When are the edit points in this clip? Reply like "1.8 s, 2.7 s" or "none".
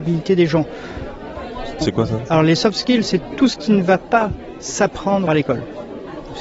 1.8 s, 5.3 s

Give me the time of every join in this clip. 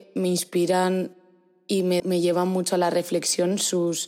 2.0 s

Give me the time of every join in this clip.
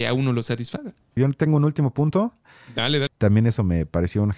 1.2 s, 3.1 s

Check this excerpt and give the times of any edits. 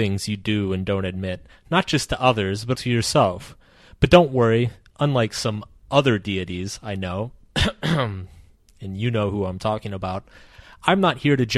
2.7 s

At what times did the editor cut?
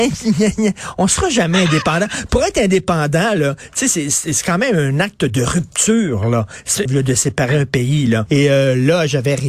6.9 s, 8.3 s

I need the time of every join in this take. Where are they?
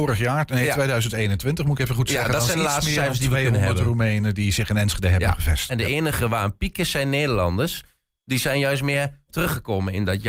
5.7 s

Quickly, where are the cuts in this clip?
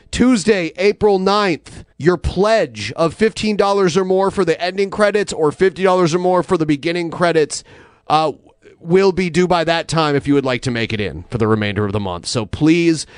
1.9 s

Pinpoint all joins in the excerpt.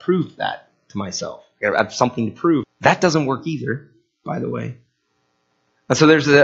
2.6 s

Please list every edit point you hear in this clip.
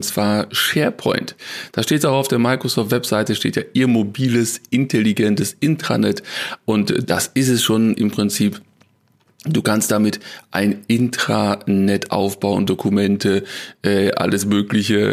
12.7 s

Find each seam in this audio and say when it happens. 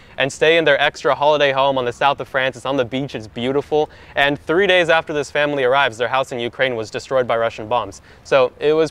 none

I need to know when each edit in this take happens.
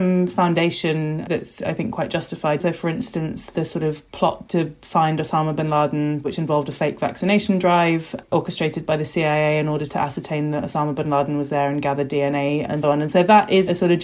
2.6 s, 12.8 s

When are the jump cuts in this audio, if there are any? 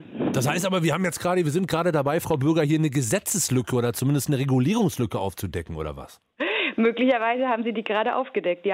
none

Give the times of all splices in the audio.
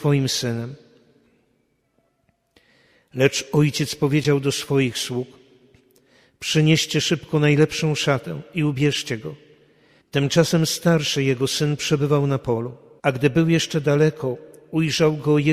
10.0 s, 13.0 s

